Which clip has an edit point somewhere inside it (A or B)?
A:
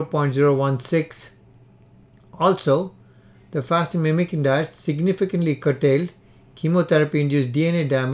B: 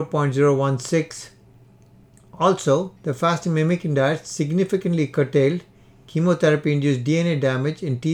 B